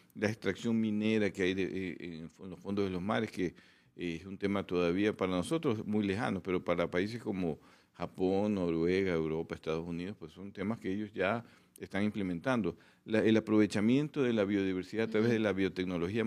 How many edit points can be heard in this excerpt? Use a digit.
0